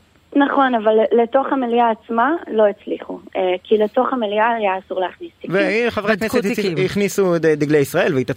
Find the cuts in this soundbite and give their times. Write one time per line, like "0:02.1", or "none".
none